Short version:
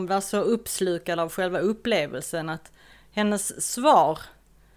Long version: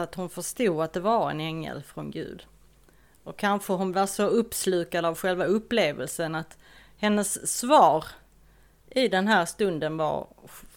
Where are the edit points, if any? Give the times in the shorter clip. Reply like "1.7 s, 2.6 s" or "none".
none

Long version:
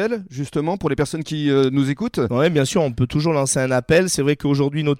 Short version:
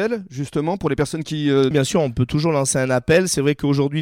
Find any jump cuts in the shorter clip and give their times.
1.7 s

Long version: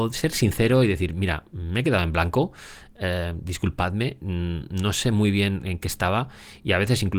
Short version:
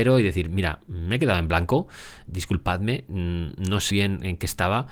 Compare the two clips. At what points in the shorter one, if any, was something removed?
2.3 s, 3.9 s

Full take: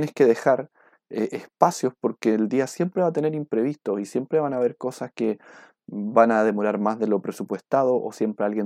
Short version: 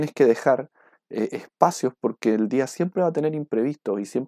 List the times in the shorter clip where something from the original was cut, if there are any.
none

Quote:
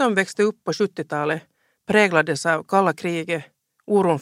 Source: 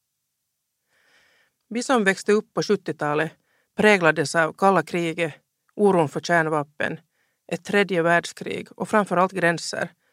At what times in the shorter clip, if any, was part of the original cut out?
none

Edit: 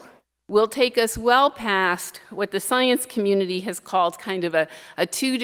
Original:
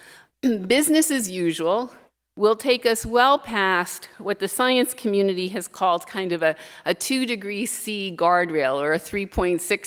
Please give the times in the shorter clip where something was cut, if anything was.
none

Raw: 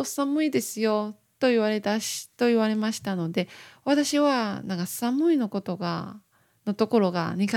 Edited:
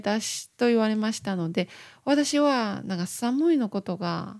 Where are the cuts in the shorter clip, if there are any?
none

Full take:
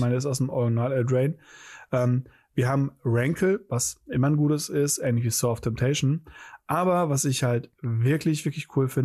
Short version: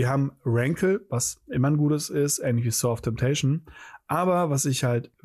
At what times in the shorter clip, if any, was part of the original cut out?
none

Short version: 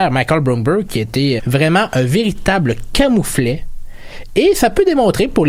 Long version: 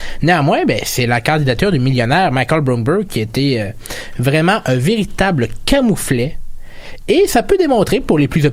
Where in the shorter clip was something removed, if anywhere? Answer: 1.4 s

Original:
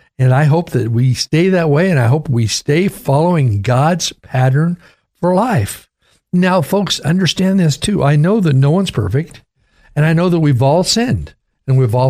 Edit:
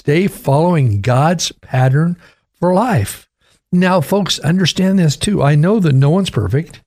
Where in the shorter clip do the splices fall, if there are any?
none

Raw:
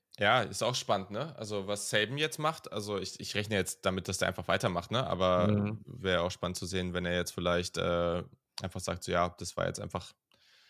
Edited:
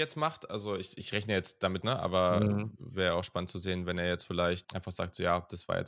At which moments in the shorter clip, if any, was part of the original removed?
1.8 s, 4.6 s

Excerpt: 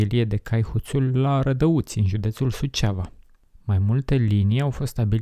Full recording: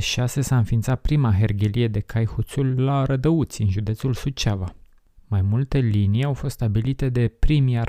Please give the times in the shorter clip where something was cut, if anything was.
none

